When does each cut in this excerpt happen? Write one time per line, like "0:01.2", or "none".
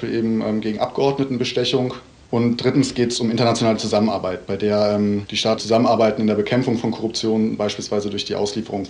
0:05.6